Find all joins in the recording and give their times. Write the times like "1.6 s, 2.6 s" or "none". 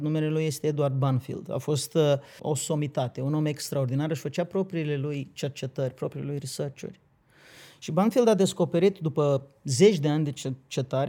2.4 s